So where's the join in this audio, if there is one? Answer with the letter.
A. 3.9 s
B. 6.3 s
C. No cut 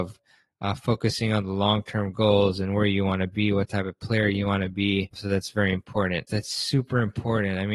B